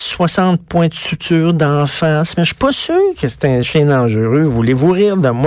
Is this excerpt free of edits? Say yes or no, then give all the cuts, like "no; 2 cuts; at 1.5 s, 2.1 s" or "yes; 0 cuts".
yes; 0 cuts